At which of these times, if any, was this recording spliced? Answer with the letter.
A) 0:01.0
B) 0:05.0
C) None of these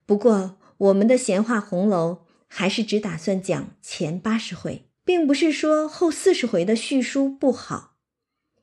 B